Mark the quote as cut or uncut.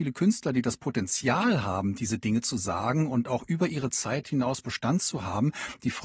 uncut